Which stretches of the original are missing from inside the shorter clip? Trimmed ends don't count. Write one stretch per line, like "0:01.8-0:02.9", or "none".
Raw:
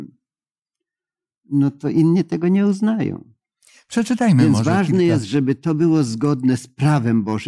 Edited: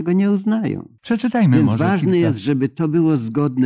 0:03.3-0:03.8